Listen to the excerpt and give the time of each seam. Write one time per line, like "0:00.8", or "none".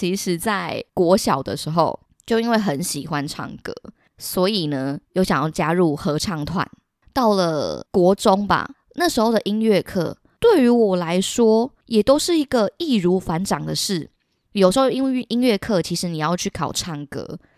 none